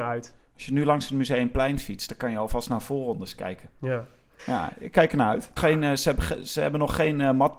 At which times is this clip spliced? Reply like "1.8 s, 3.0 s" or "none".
4.4 s, 5.6 s